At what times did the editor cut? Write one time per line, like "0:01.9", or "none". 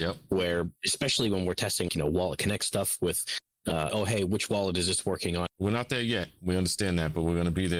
0:01.9
0:03.9
0:05.5